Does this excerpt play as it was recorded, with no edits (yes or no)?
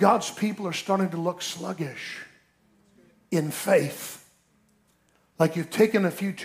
yes